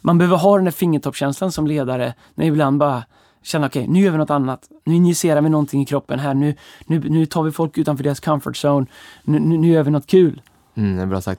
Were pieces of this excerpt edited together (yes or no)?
yes